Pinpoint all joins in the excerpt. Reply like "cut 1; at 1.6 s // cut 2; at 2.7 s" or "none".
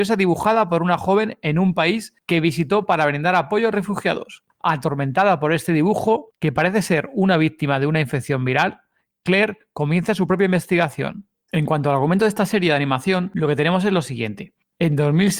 cut 1; at 11.5 s